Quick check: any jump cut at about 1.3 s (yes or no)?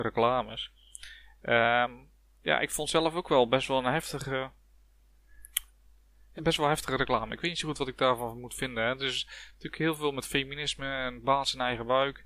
no